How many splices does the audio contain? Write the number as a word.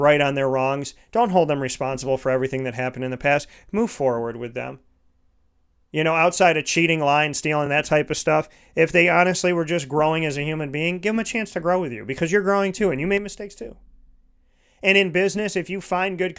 zero